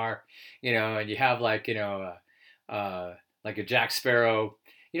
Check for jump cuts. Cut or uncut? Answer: uncut